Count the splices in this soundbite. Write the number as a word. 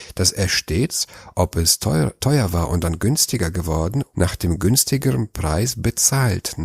one